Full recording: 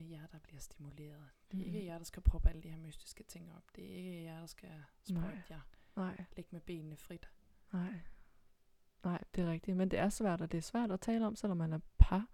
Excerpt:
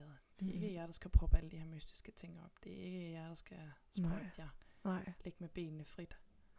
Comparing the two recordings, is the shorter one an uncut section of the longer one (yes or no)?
yes